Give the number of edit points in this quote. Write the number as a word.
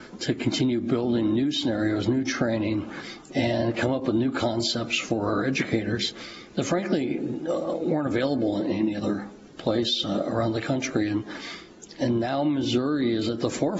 zero